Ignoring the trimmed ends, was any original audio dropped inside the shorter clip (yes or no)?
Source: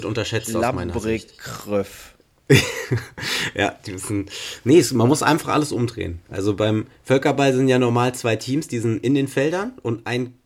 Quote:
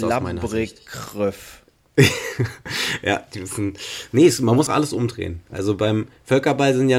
yes